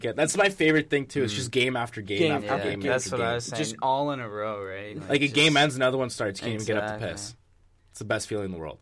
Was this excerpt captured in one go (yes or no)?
yes